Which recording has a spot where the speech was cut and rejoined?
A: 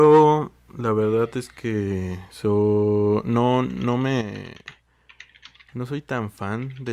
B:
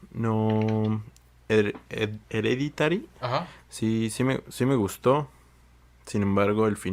B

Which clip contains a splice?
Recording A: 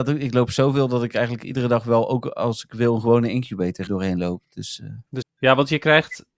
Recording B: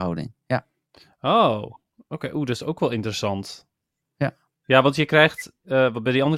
A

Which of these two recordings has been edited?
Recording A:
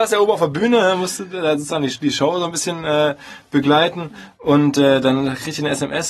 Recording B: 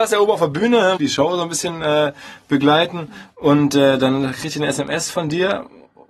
B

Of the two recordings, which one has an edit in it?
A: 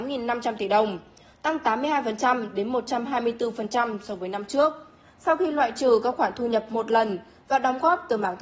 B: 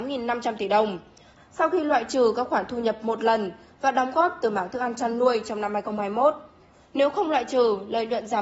B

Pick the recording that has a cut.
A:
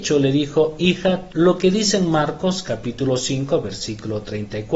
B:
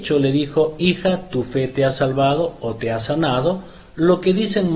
A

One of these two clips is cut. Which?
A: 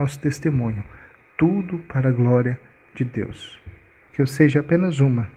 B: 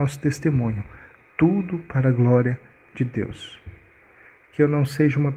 A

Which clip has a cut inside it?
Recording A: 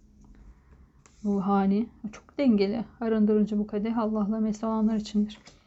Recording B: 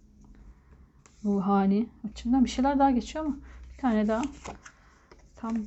B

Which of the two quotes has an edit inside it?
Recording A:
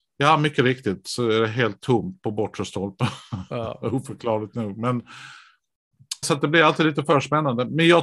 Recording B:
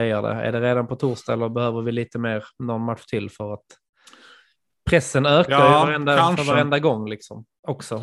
A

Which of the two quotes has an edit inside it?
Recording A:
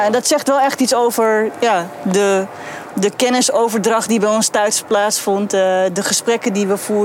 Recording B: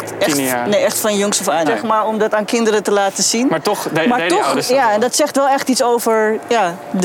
B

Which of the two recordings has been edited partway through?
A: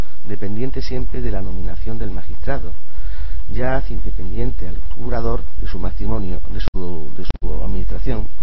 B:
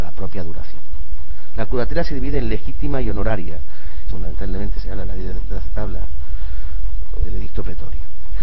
B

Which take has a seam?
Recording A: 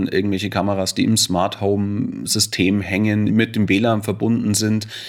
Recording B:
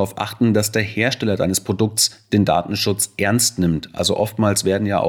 A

